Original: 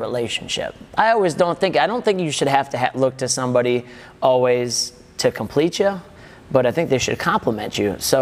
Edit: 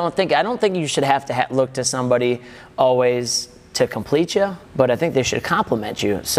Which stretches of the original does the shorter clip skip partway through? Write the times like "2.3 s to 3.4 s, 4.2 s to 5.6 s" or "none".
6.1 s to 6.4 s